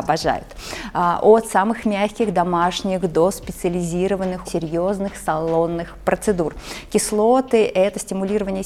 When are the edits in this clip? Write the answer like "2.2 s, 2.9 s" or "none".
4.4 s